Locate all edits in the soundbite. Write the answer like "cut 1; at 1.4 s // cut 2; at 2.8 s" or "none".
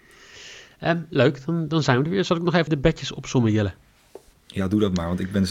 cut 1; at 2.7 s